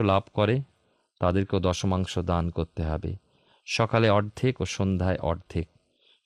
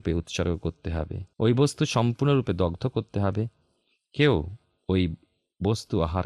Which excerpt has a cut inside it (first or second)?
second